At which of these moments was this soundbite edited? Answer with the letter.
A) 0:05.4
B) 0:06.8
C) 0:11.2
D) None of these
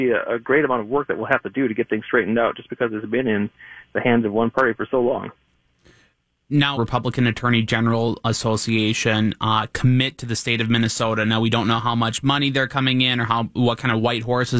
B